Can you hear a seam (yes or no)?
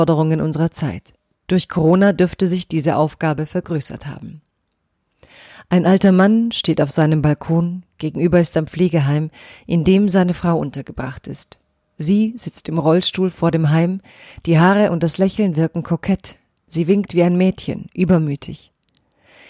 yes